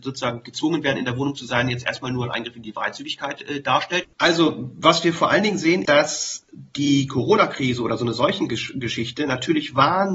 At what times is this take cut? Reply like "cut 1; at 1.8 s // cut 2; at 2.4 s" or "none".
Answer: cut 1; at 4.0 s // cut 2; at 5.9 s